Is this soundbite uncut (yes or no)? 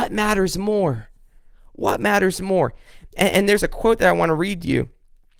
yes